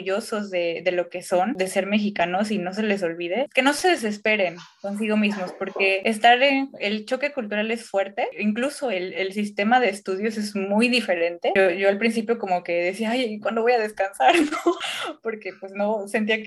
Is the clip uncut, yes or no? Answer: yes